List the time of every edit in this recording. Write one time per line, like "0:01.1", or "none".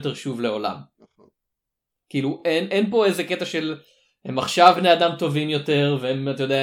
none